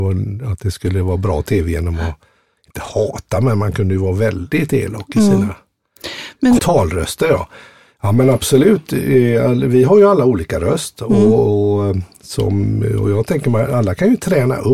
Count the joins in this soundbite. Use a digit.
1